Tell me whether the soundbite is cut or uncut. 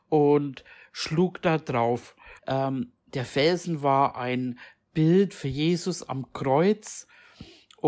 cut